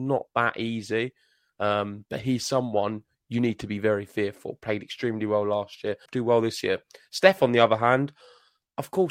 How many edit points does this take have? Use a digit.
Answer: 1